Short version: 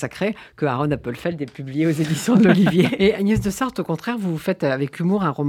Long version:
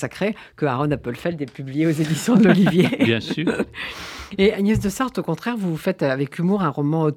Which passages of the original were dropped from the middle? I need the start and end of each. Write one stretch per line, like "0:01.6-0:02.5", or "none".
0:03.0-0:04.4